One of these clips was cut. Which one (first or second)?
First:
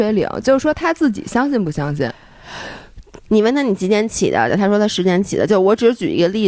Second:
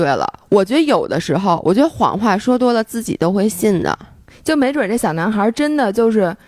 first